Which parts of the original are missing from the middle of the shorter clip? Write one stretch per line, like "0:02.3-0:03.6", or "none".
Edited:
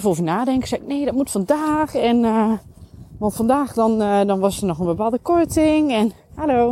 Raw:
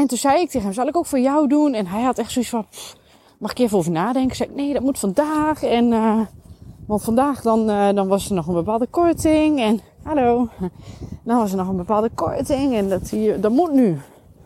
none